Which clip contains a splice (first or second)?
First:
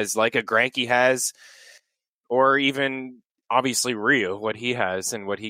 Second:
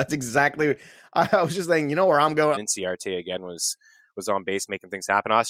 second